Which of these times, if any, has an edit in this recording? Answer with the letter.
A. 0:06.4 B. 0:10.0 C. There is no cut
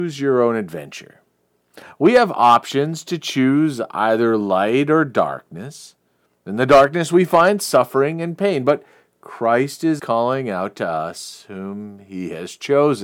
B